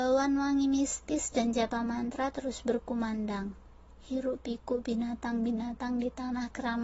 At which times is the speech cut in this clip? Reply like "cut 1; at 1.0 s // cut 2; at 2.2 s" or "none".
none